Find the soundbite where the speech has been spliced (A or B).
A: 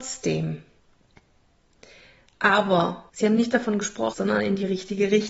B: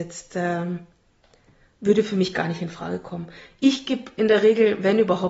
A